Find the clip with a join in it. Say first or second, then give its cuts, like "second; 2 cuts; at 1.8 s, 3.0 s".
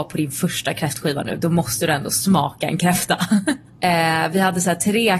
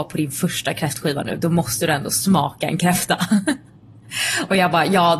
first; 1 cut; at 3.7 s